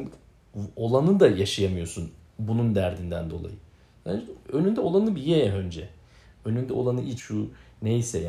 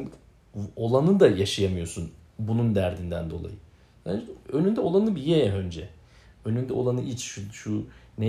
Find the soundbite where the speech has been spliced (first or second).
first